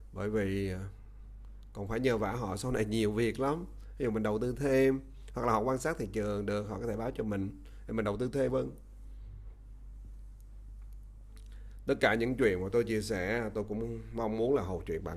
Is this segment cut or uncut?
cut